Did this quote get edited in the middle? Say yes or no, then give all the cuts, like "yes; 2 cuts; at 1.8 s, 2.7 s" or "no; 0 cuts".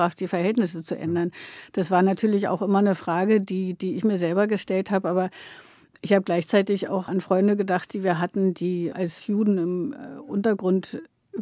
no; 0 cuts